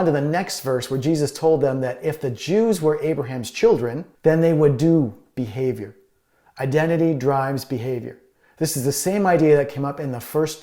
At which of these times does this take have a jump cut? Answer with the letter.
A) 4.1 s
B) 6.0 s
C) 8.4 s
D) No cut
A